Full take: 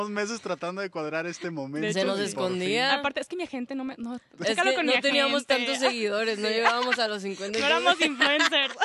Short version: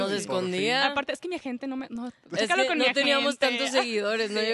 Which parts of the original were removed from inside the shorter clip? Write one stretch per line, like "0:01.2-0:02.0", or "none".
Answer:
none